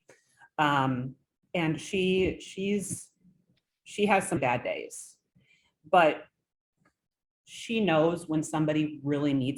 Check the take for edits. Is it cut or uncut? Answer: cut